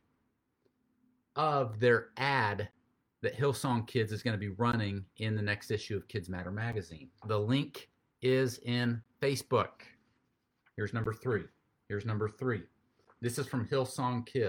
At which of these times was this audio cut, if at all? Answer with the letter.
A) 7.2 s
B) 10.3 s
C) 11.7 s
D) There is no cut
A